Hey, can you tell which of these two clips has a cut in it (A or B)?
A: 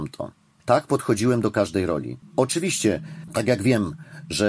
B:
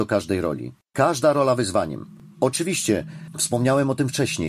A